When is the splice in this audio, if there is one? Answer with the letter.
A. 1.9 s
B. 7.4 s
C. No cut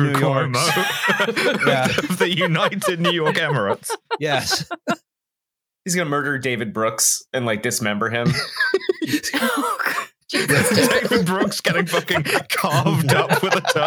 C